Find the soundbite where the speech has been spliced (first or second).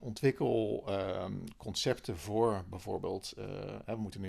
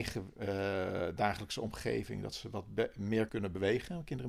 second